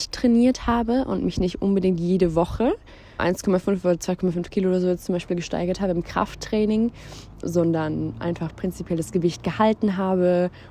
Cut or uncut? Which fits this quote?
cut